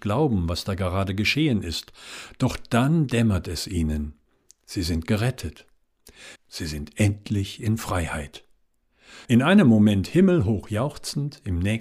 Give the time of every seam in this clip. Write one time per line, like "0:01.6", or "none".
0:06.4
0:09.2